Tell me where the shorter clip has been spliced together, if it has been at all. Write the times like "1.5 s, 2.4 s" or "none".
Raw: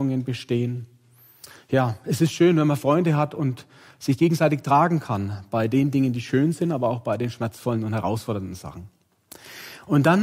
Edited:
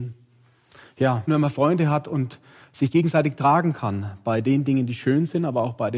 1.3 s